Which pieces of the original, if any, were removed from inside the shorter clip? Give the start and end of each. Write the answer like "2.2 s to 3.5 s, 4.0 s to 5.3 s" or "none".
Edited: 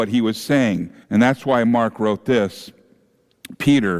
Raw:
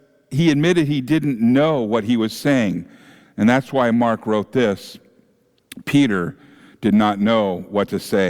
3.0 s to 3.3 s